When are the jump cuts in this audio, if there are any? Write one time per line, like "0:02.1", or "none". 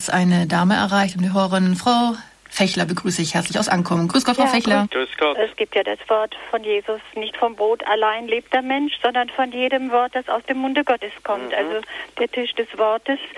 0:04.8